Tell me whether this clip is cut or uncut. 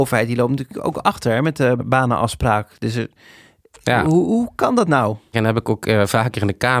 cut